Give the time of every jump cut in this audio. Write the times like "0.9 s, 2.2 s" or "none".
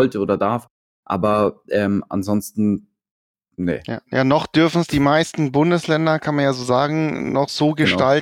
none